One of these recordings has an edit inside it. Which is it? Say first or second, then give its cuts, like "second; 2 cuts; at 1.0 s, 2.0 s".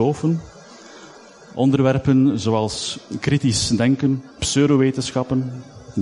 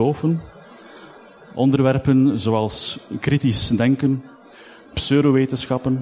first; 1 cut; at 4.3 s